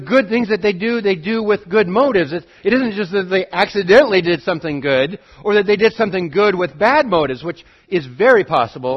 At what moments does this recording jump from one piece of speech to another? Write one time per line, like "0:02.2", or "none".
none